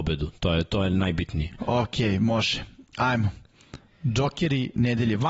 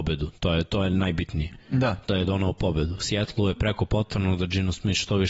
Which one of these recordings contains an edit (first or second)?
first